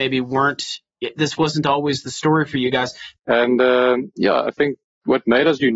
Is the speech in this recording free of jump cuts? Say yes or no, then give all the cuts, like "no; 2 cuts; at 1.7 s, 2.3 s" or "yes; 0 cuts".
no; 1 cut; at 3.2 s